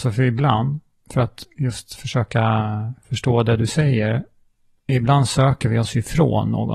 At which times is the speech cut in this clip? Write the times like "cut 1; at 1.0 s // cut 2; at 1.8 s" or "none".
none